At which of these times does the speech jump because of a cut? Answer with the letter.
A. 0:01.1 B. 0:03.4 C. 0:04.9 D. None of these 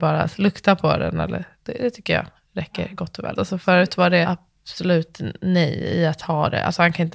B